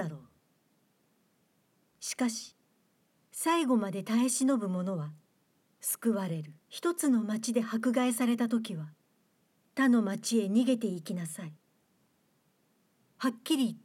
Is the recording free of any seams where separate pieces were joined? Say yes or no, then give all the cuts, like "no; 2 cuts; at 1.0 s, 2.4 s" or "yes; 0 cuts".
no; 2 cuts; at 1.9 s, 6.6 s